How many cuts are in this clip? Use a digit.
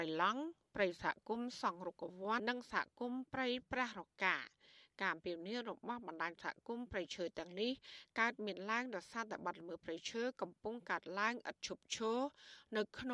1